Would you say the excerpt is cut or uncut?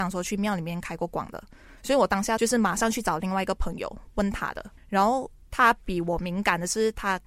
cut